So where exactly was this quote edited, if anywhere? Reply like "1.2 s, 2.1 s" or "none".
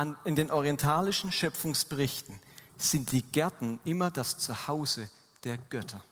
none